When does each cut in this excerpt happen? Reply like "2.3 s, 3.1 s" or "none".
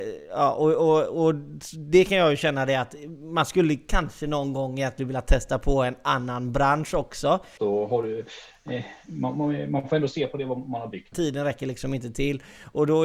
7.6 s, 11.1 s